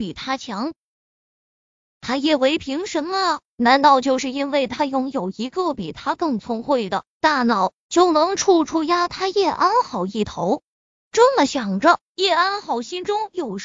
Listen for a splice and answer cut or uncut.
cut